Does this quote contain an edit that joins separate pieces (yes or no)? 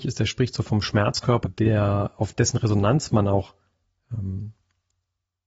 yes